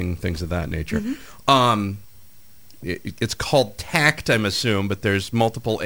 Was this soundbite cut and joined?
yes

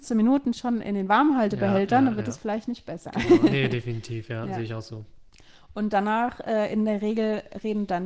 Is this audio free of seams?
yes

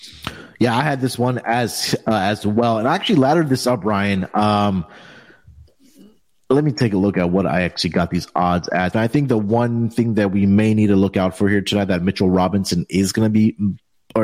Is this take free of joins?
no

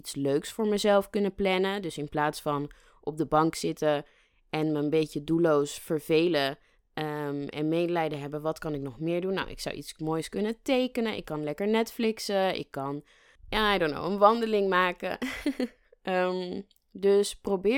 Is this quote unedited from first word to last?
yes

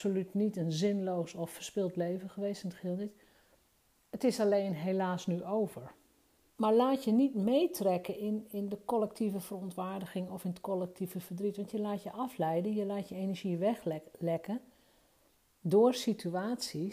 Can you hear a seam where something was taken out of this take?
yes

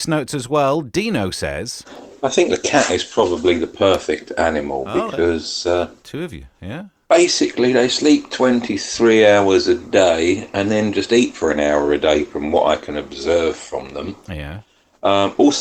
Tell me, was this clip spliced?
no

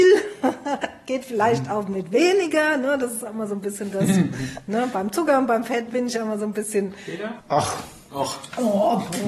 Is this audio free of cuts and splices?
no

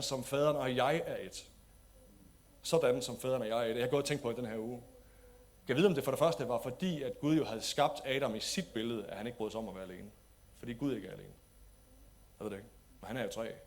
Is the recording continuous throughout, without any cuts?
yes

